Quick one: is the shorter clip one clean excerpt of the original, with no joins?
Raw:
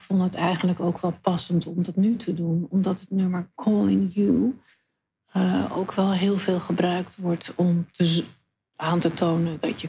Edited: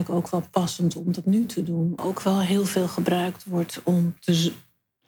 no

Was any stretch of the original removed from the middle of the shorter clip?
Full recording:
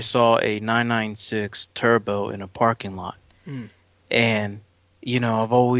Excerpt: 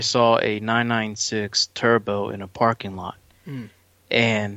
no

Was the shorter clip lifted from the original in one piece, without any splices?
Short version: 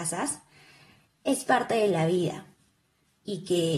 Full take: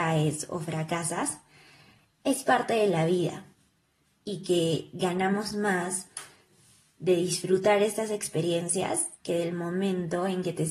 yes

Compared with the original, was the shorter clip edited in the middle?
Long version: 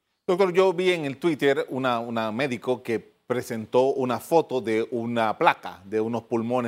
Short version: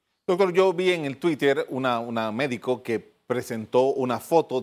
no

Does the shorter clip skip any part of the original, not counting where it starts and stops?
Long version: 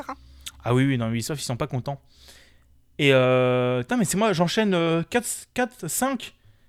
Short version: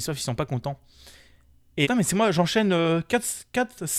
yes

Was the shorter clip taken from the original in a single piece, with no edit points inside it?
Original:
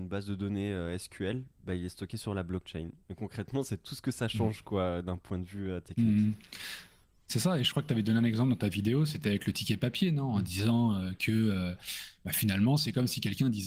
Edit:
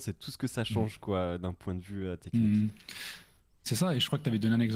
yes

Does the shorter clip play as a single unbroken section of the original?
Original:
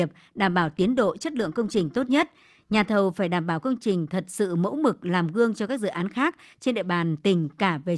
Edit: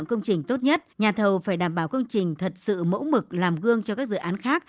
no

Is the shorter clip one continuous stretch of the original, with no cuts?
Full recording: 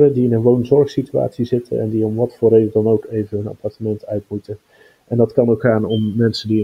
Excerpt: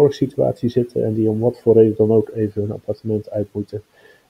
yes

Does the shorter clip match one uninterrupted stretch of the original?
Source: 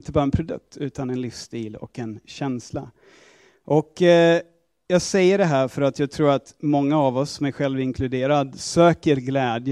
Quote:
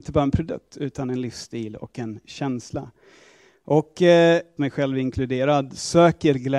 no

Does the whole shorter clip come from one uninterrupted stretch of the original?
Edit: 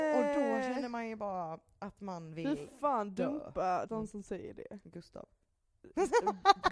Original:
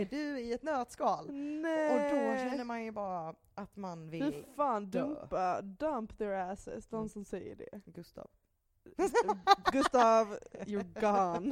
no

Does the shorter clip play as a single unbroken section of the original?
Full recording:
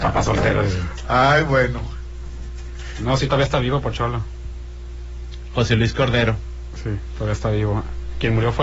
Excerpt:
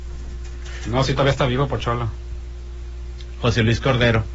yes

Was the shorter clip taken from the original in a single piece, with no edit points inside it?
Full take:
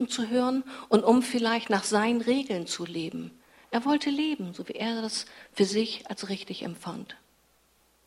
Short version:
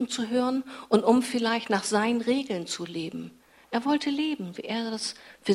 no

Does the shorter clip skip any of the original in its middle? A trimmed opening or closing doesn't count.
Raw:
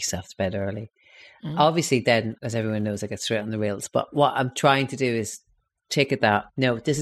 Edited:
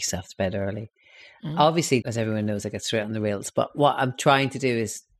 yes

